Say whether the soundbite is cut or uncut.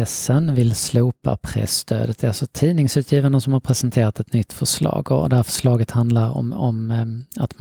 uncut